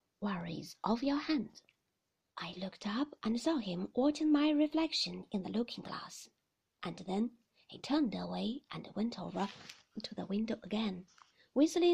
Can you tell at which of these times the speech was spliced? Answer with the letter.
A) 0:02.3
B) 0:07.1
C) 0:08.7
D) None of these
A